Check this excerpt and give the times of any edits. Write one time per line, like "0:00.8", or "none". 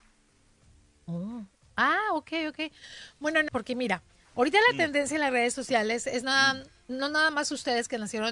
0:03.5